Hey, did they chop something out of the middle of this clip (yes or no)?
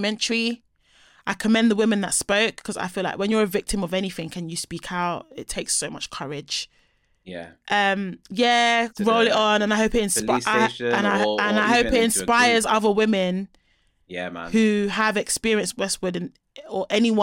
yes